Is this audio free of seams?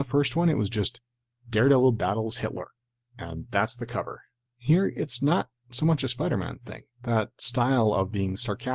no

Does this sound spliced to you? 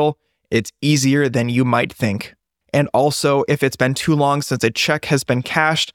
yes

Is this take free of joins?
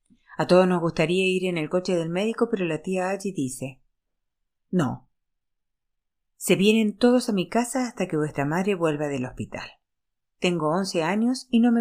no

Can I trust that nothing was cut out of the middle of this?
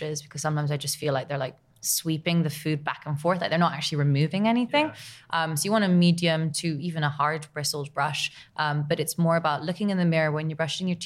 yes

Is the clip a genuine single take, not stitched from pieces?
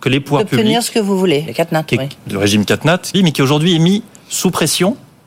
no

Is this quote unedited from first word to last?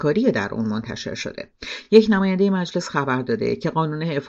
yes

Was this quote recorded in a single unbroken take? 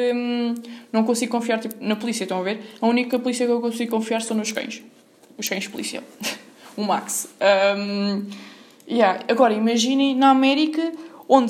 yes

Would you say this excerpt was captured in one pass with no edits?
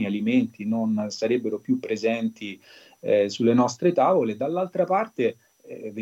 yes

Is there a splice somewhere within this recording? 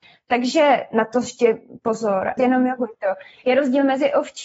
yes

